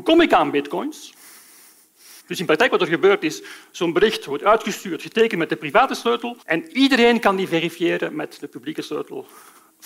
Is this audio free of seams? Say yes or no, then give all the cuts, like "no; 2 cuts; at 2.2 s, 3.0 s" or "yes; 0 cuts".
no; 2 cuts; at 2.2 s, 6.4 s